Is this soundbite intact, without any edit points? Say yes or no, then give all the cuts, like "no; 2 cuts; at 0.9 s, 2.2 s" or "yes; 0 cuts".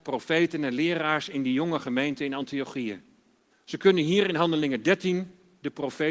no; 1 cut; at 3.5 s